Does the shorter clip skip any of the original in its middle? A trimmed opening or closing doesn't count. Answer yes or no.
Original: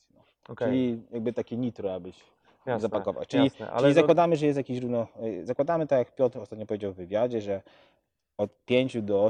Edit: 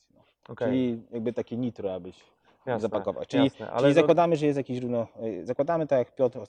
no